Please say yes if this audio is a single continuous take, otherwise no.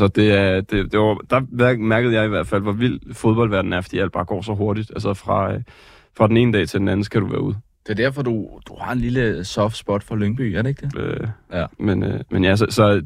no